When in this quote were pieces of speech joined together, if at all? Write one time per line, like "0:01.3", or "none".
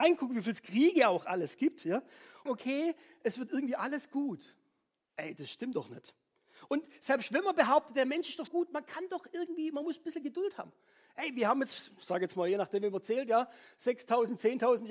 0:02.5
0:08.5

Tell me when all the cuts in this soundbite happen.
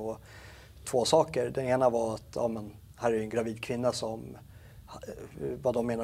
none

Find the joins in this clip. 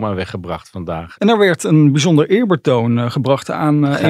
0:01.2

